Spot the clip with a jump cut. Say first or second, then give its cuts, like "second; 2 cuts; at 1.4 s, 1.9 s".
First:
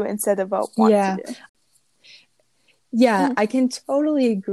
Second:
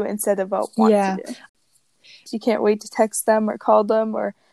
second; 1 cut; at 2.3 s